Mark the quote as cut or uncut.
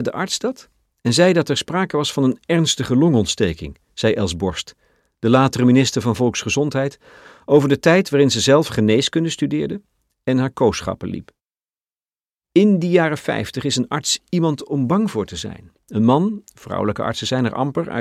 uncut